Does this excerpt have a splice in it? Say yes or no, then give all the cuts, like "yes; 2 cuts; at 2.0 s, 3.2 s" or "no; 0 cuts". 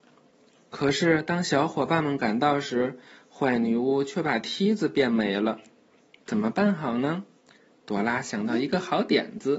no; 0 cuts